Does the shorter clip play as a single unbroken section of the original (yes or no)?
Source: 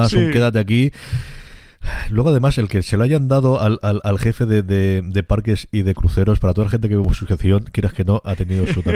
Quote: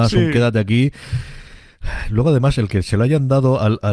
yes